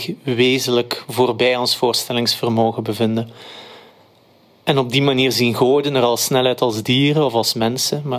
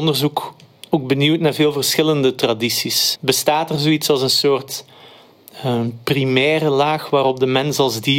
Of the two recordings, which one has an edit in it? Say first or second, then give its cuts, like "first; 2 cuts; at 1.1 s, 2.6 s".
second; 1 cut; at 3.2 s